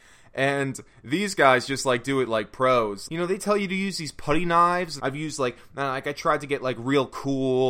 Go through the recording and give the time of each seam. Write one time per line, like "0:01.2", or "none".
0:03.1
0:05.0